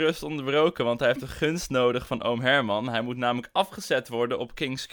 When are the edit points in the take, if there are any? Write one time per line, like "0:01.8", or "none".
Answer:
none